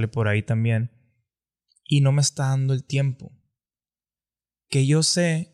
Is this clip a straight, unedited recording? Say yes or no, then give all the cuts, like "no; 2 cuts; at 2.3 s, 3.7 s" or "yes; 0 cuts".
yes; 0 cuts